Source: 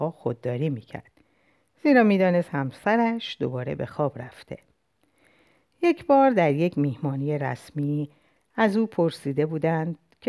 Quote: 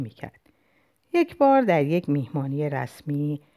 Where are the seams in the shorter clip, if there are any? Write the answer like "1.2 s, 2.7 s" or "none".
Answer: 1.0 s